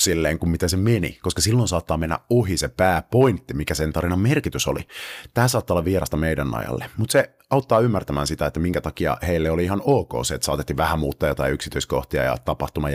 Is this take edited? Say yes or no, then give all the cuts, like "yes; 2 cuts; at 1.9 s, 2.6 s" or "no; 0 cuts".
no; 0 cuts